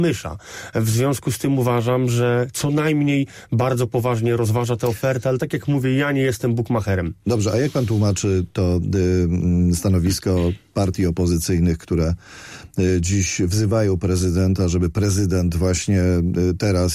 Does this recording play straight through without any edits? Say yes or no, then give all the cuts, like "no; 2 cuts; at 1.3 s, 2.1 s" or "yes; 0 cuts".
yes; 0 cuts